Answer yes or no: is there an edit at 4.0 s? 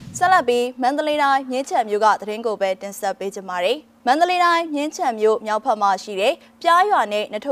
yes